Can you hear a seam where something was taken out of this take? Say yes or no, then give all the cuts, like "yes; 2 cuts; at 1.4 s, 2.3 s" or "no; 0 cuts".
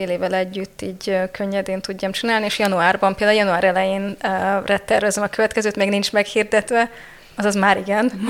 no; 0 cuts